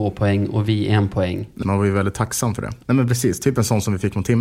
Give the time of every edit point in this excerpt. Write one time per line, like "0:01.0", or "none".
0:01.6
0:02.8